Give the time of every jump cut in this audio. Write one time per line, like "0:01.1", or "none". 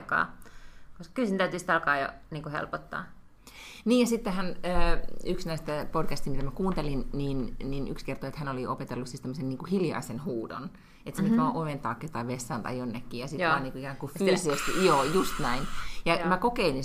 none